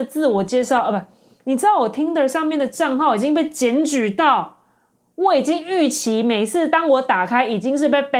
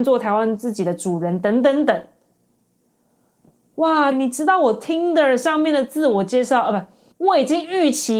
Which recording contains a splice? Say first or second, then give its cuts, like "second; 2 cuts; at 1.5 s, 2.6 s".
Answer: second; 2 cuts; at 4.1 s, 7.1 s